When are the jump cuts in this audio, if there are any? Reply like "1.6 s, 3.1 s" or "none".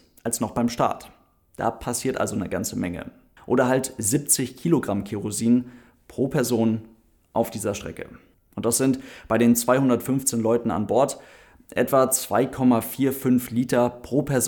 3.4 s, 8.4 s